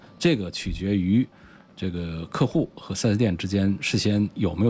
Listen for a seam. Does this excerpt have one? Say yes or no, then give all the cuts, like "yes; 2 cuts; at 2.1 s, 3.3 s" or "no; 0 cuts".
no; 0 cuts